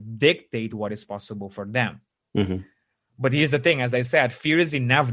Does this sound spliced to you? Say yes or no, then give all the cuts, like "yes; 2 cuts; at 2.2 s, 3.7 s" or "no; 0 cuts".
no; 0 cuts